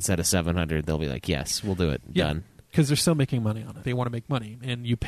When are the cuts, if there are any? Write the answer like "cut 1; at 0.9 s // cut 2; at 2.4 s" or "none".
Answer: cut 1; at 3.8 s